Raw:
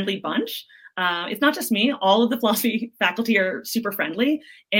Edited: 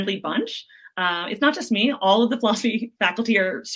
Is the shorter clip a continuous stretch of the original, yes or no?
yes